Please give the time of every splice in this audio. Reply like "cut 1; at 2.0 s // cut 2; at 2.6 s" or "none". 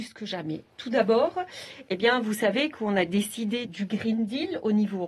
cut 1; at 3.6 s